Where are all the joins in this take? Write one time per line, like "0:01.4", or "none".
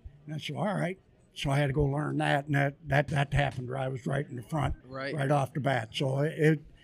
0:03.1
0:04.8

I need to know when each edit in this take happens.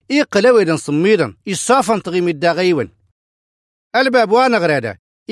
0:01.4

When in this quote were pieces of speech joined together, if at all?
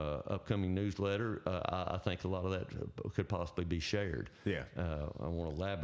none

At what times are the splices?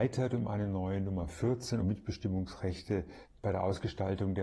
0:01.8

